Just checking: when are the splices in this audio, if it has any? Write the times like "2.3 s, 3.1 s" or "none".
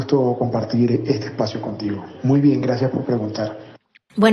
none